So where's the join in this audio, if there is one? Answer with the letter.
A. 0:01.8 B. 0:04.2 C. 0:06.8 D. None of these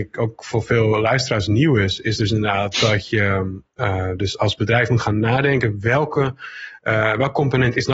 D